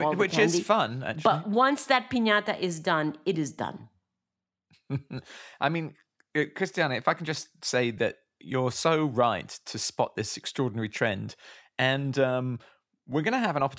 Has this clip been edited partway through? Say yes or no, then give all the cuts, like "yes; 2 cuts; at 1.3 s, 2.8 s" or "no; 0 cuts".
no; 0 cuts